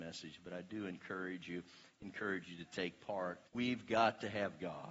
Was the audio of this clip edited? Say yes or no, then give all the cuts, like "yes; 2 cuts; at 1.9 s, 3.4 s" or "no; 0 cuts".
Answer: yes; 1 cut; at 3.5 s